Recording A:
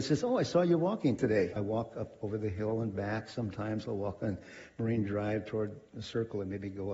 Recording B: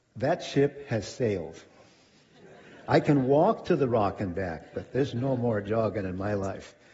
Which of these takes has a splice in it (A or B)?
A